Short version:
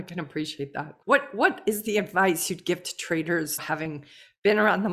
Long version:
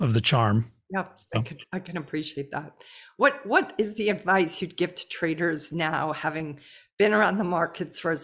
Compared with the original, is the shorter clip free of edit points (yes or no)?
no